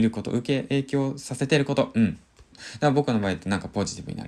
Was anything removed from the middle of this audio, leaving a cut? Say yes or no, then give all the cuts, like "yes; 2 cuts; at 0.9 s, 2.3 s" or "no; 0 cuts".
yes; 1 cut; at 2.5 s